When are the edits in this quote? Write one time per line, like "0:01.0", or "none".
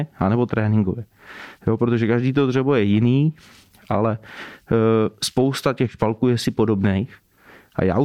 none